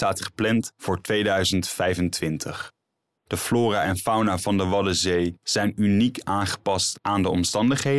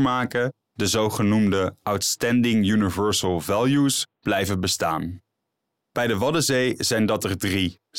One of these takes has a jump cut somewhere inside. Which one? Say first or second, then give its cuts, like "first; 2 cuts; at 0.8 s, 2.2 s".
first; 1 cut; at 3.2 s